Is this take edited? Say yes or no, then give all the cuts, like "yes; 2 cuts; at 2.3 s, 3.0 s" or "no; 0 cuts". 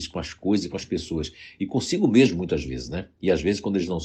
no; 0 cuts